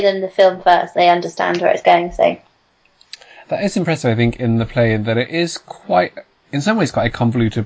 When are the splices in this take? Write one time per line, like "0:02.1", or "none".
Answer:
0:00.9